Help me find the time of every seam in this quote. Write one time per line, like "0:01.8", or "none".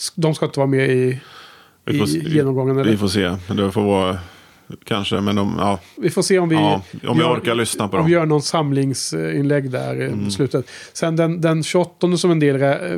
none

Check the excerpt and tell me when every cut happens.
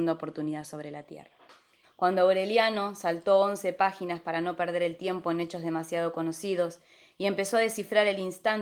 0:01.8

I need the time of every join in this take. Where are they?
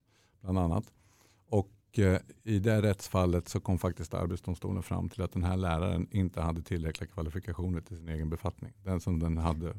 none

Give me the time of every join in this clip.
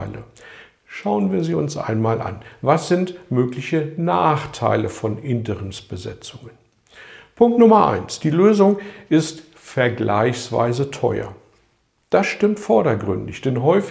none

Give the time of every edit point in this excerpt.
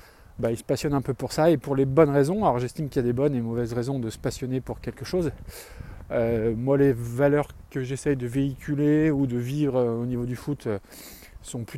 none

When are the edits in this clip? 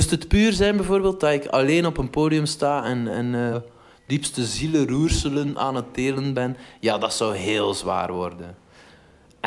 0:03.5

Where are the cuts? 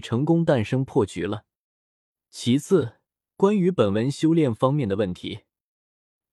none

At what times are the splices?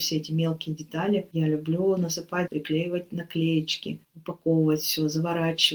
0:02.5

